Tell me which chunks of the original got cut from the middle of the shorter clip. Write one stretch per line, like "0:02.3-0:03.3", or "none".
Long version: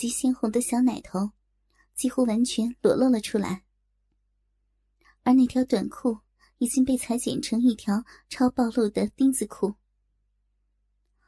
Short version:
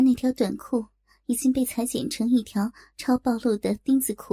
none